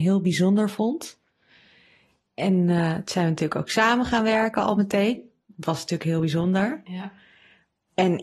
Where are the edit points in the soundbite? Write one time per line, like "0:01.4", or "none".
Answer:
none